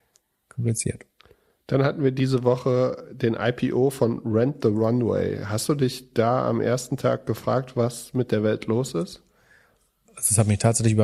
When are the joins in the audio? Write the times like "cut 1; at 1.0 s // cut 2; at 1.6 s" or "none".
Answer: none

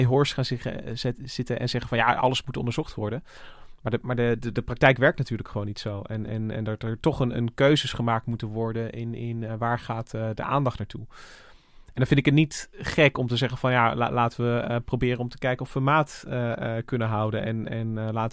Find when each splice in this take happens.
none

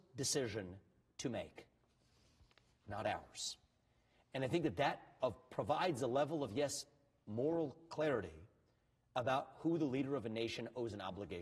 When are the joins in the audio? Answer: none

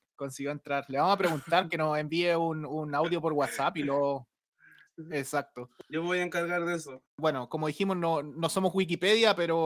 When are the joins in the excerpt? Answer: none

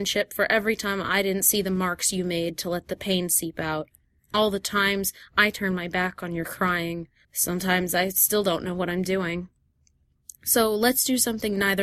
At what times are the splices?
cut 1; at 7.2 s

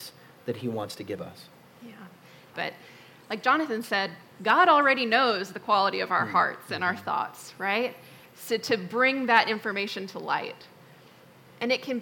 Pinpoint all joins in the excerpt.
cut 1; at 2.5 s // cut 2; at 8.2 s

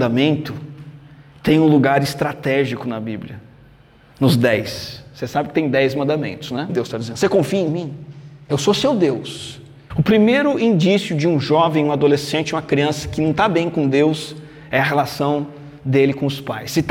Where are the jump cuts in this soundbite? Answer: cut 1; at 6.7 s // cut 2; at 9.9 s

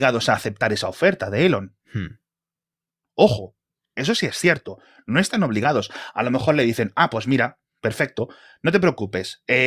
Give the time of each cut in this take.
none

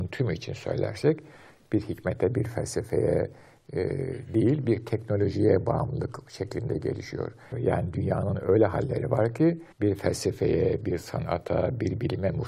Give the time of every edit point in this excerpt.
cut 1; at 7.5 s // cut 2; at 9.7 s

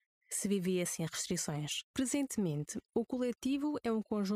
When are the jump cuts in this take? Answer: cut 1; at 1.9 s

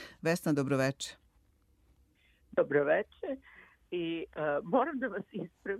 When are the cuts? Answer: none

